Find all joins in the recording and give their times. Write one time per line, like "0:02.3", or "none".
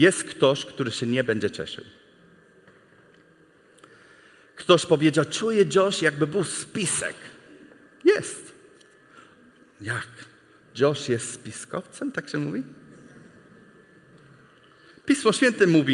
none